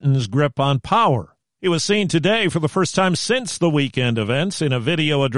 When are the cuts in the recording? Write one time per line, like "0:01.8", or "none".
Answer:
none